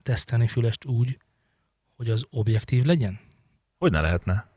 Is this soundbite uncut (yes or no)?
yes